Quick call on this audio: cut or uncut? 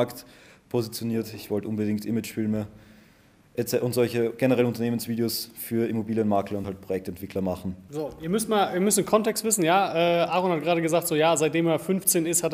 uncut